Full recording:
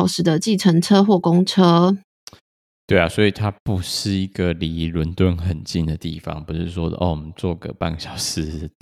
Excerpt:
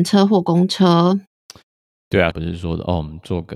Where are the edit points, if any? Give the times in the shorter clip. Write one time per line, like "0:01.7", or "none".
0:02.3